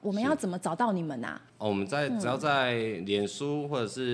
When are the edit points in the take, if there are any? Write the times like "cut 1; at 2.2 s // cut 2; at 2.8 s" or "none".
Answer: cut 1; at 1.5 s